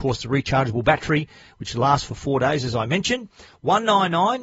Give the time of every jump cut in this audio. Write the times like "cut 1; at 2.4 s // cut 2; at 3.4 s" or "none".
none

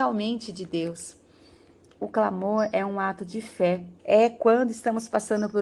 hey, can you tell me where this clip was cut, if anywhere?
cut 1; at 4.0 s

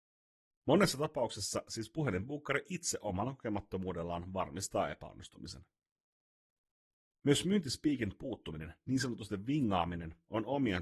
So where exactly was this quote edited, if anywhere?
none

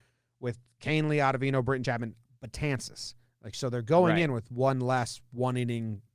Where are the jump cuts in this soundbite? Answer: none

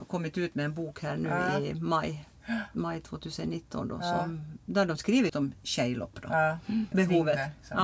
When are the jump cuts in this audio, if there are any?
cut 1; at 5.3 s // cut 2; at 6.9 s

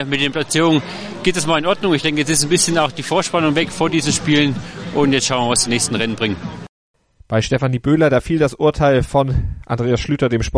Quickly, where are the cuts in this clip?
none

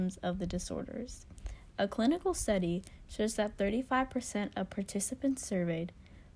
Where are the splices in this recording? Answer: none

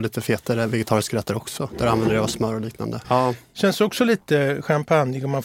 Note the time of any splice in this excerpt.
cut 1; at 3.0 s

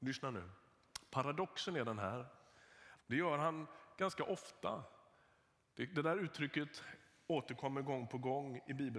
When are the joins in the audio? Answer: cut 1; at 3.0 s

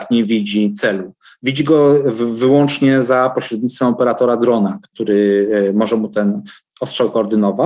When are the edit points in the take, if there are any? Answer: none

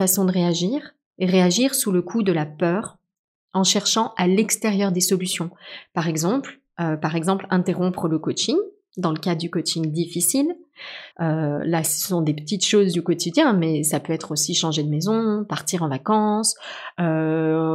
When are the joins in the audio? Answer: cut 1; at 11.1 s

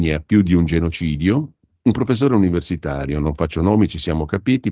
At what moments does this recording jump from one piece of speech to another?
none

